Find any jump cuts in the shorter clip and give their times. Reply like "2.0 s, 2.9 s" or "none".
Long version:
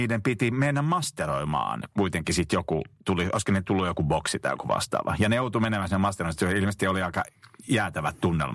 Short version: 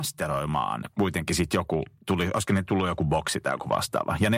none